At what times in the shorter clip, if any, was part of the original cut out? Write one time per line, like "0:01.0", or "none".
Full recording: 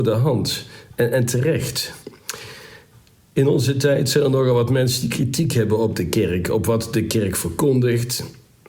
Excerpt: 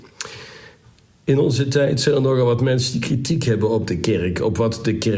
none